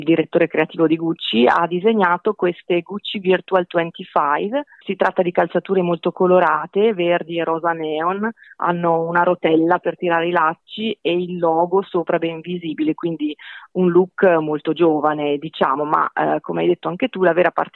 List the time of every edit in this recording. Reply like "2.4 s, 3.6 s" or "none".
none